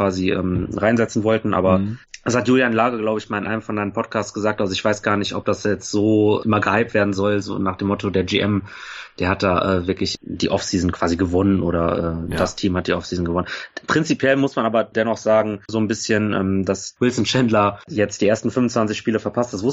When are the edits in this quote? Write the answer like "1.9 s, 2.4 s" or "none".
15.7 s